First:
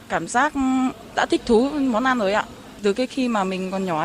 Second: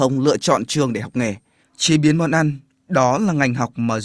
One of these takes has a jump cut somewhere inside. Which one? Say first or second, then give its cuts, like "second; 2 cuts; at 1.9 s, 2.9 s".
second; 1 cut; at 1.6 s